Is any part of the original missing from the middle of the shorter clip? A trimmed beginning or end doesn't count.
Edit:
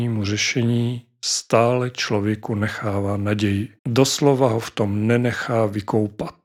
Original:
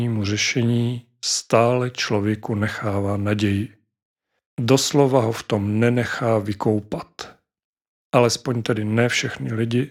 yes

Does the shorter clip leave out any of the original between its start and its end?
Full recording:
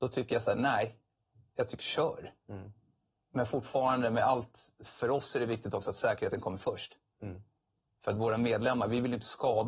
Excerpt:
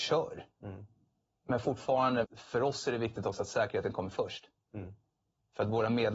yes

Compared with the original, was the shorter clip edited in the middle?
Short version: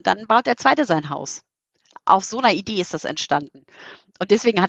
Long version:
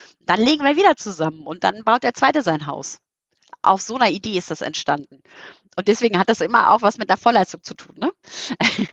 no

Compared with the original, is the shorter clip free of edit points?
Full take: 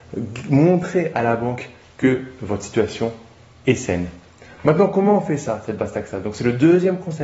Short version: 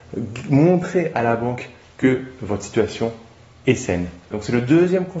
no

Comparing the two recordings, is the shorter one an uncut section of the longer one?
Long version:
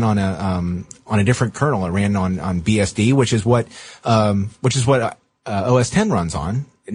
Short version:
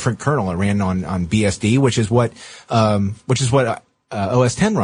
yes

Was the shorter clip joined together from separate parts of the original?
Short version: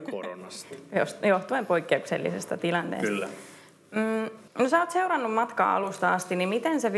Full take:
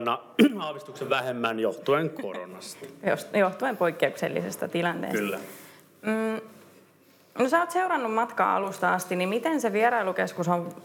yes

